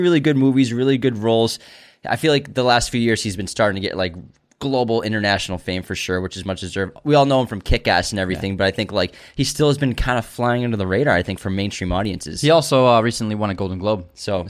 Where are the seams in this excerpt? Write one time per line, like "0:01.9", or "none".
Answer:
none